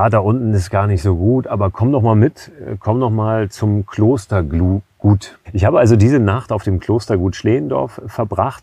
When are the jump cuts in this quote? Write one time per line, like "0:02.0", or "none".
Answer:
0:05.4